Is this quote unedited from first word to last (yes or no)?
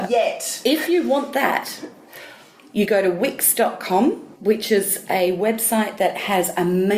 no